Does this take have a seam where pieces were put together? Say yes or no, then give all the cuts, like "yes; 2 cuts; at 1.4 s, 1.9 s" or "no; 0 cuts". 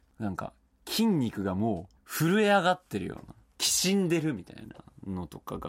yes; 1 cut; at 2.0 s